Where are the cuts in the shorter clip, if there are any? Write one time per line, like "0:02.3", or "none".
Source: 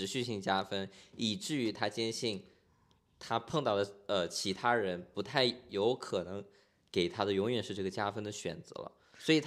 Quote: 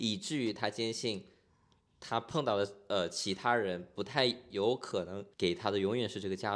0:05.3